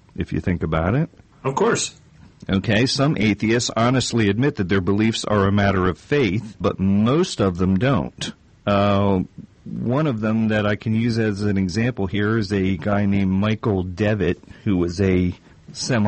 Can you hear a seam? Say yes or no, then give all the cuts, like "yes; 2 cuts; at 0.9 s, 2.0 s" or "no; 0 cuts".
yes; 1 cut; at 6.6 s